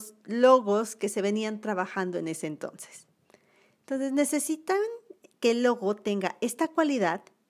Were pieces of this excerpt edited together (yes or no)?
no